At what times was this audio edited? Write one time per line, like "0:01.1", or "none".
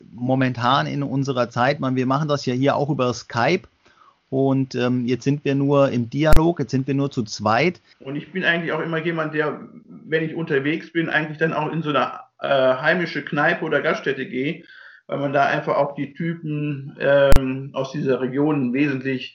0:07.9